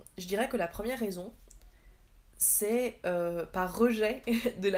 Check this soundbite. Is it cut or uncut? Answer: uncut